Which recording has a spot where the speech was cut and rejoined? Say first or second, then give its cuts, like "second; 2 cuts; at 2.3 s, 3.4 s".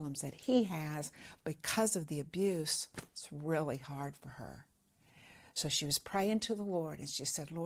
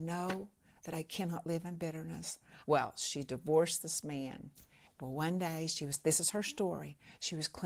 second; 2 cuts; at 2.6 s, 4.9 s